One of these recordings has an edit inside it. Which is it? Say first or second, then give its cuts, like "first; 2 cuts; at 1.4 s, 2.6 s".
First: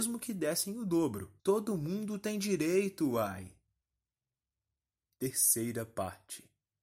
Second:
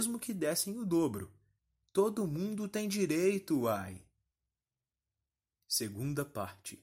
first; 2 cuts; at 1.4 s, 5.2 s